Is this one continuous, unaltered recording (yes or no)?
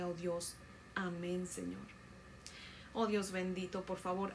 no